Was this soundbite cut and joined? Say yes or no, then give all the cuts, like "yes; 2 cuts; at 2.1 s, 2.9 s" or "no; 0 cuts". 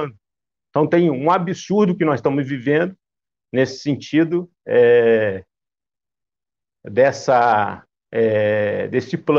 no; 0 cuts